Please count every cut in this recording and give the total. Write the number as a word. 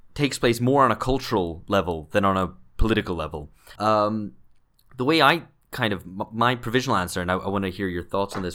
one